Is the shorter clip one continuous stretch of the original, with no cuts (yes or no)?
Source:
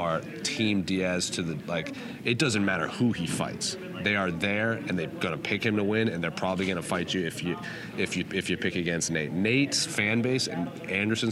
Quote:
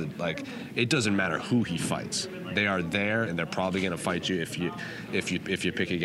no